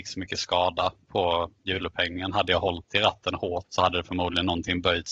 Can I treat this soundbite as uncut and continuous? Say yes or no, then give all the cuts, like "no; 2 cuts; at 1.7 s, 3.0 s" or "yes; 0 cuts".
no; 1 cut; at 3.6 s